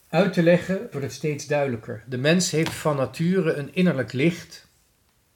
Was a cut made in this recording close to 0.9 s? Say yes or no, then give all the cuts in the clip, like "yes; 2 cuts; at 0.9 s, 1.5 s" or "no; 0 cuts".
yes; 1 cut; at 0.9 s